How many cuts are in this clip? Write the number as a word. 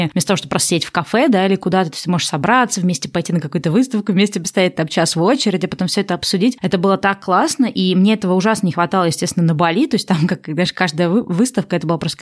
zero